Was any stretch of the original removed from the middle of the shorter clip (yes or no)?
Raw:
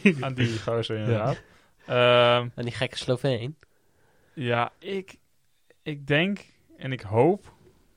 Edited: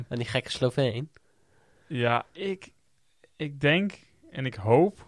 no